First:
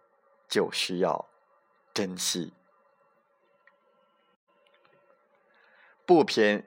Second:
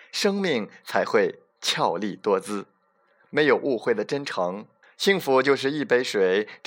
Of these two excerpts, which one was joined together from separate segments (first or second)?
second